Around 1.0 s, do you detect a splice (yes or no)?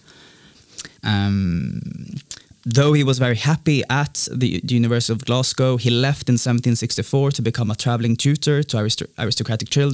yes